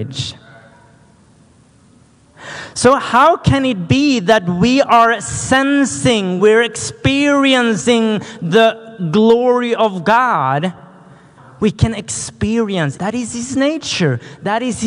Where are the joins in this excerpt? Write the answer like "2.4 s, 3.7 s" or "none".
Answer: 6.4 s, 11.4 s, 13.0 s